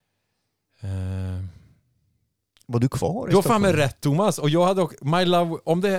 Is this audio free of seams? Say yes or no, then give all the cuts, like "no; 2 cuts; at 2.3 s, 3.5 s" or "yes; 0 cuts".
yes; 0 cuts